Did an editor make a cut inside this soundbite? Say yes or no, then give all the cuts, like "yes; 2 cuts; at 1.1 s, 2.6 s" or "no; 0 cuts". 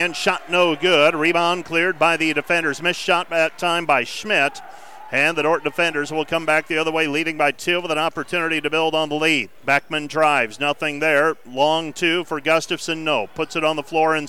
yes; 1 cut; at 9.6 s